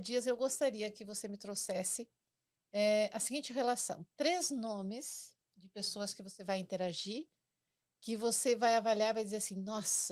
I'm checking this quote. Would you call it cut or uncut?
uncut